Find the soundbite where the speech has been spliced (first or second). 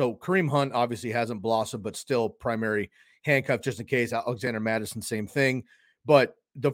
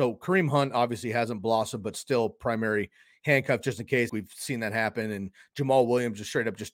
second